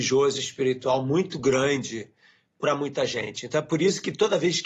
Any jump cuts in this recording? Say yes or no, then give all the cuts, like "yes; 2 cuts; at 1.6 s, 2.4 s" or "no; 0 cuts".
no; 0 cuts